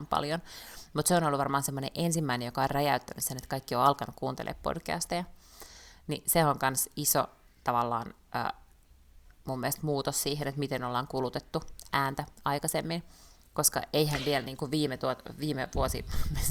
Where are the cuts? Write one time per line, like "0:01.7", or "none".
none